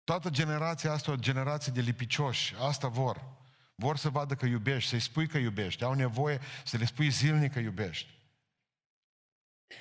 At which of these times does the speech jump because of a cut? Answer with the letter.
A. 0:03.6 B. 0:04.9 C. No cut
C